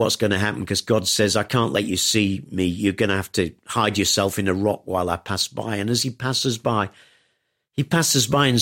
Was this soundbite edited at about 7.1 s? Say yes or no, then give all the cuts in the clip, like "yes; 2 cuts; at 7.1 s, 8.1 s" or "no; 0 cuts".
no; 0 cuts